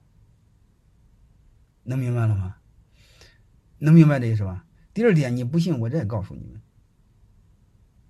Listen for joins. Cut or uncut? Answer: cut